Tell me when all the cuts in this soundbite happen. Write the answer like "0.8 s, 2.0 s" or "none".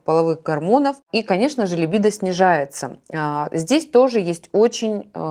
none